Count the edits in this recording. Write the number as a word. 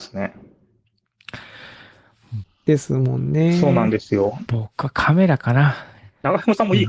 two